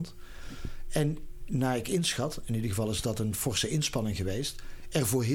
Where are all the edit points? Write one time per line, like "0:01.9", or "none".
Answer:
none